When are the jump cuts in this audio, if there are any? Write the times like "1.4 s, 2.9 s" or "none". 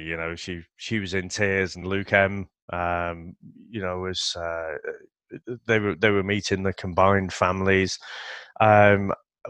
1.8 s